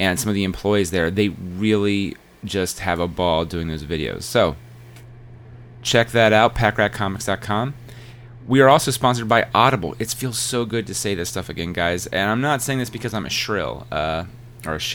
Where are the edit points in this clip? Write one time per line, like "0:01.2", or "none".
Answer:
none